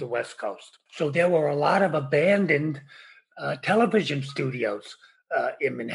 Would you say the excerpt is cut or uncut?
uncut